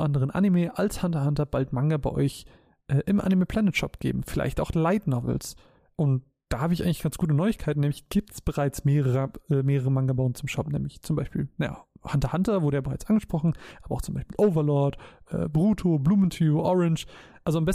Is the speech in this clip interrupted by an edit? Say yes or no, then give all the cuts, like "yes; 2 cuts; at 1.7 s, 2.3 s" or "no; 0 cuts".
no; 0 cuts